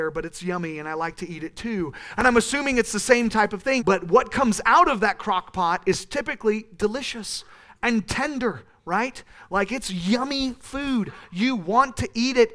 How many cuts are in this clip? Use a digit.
1